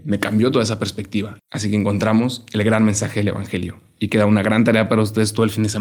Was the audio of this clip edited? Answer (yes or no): yes